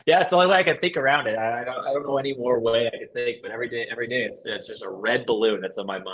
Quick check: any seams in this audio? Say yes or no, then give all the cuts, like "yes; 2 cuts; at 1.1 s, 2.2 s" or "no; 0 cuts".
no; 0 cuts